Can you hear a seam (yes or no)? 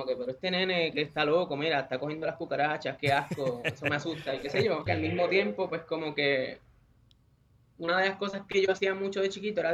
yes